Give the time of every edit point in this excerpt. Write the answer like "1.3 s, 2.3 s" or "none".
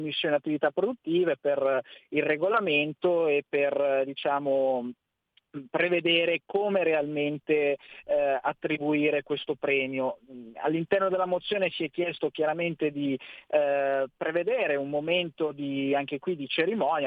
14.1 s